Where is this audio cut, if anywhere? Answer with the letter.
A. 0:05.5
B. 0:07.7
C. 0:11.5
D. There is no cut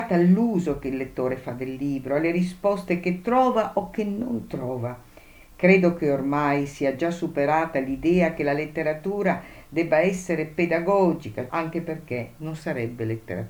C